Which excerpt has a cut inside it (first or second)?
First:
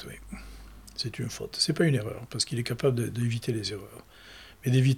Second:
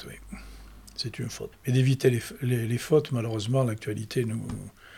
second